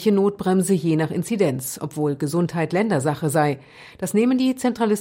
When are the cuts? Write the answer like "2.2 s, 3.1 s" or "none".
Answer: none